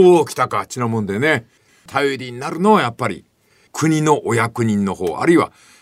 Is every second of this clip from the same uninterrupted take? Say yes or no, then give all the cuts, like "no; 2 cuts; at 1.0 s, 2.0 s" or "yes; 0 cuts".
yes; 0 cuts